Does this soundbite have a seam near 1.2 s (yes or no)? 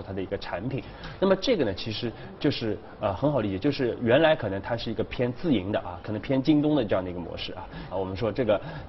no